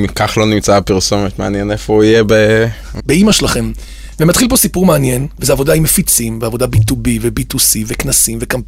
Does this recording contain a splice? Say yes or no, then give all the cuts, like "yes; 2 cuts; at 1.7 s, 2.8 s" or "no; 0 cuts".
yes; 1 cut; at 3.0 s